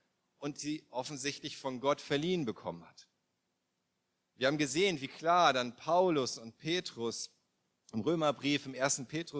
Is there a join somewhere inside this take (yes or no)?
no